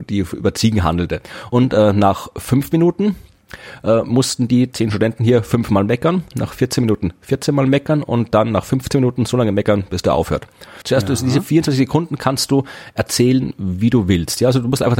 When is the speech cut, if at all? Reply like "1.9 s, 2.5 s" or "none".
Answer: 1.5 s, 6.3 s, 10.8 s